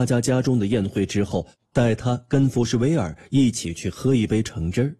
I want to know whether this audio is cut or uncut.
uncut